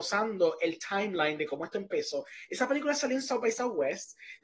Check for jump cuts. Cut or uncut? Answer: uncut